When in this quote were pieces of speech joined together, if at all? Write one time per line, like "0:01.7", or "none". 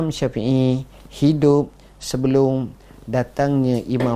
none